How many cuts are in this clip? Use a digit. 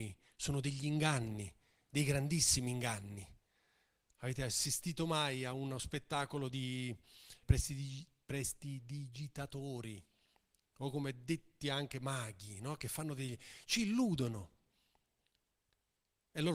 1